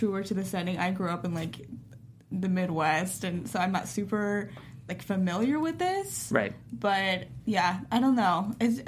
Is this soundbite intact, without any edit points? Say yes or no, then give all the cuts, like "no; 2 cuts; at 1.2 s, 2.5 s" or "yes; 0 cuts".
yes; 0 cuts